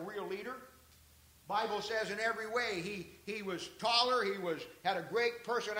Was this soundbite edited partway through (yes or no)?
no